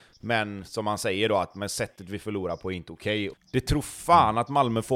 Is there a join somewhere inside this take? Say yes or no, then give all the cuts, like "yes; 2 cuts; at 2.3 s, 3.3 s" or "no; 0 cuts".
yes; 1 cut; at 3.3 s